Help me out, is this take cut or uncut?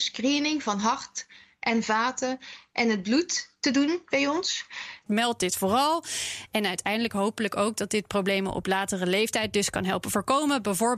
cut